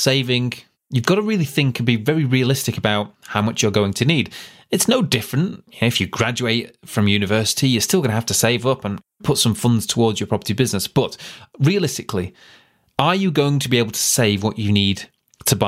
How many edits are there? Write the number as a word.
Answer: zero